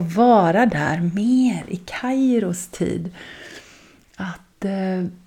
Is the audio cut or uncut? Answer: uncut